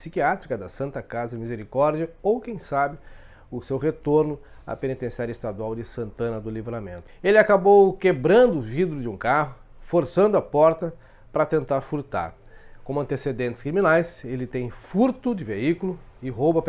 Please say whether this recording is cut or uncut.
cut